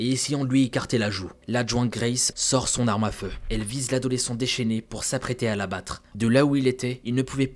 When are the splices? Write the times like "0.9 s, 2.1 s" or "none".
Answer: 2.3 s, 6.1 s